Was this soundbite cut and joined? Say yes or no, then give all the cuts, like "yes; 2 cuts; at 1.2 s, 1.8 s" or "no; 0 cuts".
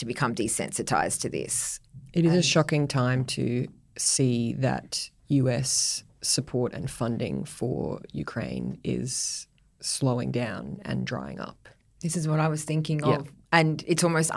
no; 0 cuts